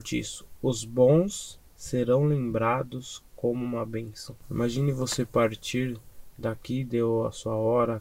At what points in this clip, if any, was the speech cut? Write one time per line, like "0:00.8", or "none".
none